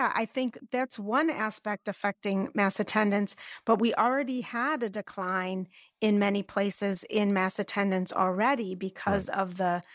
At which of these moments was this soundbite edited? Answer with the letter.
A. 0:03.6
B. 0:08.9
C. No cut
C